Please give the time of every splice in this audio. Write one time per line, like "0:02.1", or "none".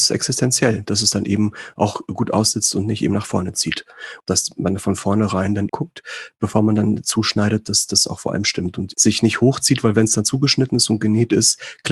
0:04.2
0:05.7
0:08.9